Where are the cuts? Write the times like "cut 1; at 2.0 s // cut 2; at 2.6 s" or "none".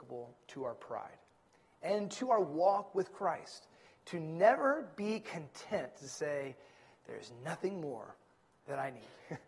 none